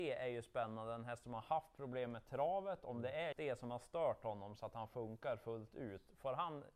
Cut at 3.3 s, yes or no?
yes